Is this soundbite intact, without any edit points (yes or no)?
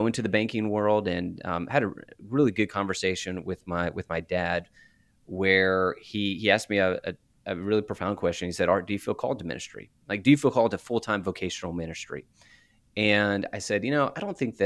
yes